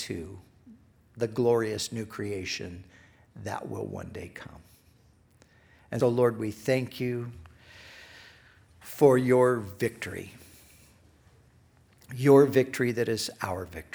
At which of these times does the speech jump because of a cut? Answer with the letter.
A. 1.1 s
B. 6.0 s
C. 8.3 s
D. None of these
B